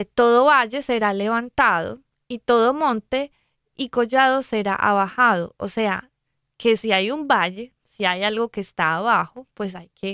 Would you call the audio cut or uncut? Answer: uncut